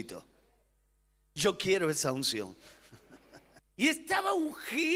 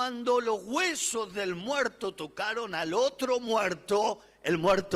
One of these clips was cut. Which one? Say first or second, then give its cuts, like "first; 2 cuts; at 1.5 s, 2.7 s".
first; 1 cut; at 3.6 s